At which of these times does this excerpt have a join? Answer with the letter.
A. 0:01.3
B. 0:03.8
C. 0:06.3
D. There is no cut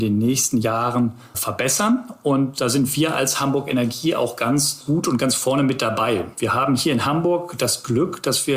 A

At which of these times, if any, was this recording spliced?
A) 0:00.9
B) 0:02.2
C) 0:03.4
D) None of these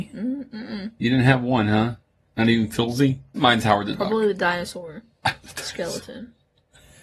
C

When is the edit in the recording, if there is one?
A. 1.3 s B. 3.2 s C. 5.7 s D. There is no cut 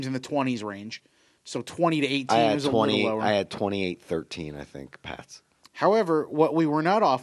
C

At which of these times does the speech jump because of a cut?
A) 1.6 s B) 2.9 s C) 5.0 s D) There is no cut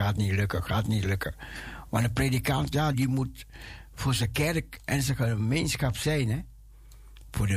B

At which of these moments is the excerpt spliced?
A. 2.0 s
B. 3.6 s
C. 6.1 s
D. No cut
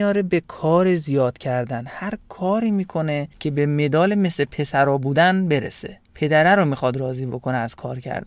C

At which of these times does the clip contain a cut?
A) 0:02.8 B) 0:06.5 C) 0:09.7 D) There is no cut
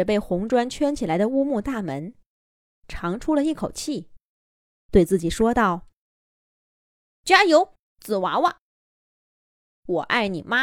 D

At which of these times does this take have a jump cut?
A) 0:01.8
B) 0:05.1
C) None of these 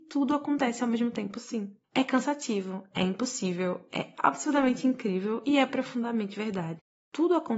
A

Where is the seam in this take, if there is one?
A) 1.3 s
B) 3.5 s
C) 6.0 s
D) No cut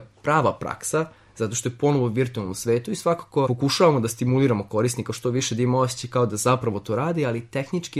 B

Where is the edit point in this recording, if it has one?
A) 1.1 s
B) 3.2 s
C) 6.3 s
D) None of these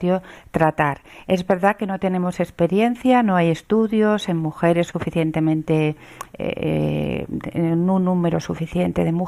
D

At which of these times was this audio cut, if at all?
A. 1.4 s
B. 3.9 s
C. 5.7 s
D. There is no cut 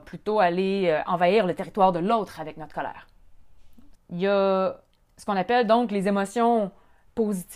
B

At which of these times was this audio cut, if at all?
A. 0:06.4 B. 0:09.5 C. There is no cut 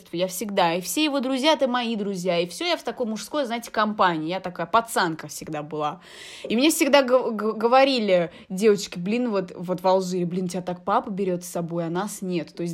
C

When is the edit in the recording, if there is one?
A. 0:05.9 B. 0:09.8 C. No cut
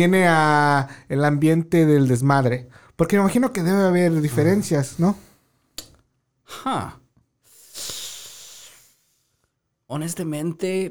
C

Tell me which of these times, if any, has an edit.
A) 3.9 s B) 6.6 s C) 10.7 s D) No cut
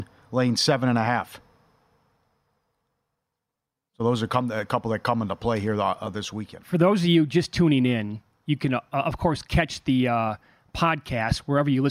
D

